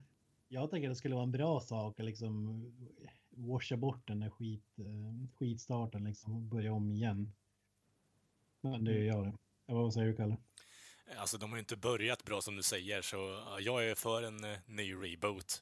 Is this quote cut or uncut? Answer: uncut